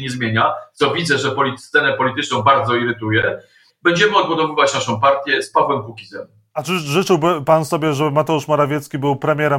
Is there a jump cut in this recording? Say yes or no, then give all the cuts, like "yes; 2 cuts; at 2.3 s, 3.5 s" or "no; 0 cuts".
yes; 1 cut; at 3.7 s